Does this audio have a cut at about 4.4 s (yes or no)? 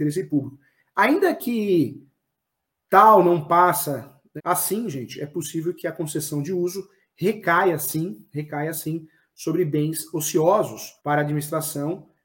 yes